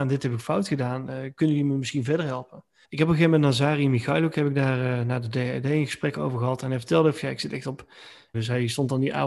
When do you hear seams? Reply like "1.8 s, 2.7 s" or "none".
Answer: 2.8 s, 8.3 s